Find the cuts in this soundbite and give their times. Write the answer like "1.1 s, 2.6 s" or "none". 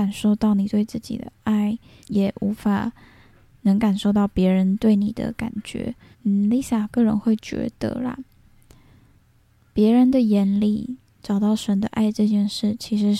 2.0 s, 6.1 s